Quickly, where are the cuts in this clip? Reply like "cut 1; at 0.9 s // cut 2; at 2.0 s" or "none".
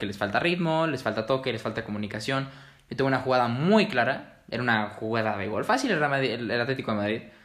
none